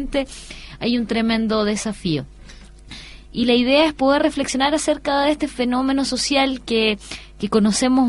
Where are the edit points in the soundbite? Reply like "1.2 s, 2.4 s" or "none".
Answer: 3.3 s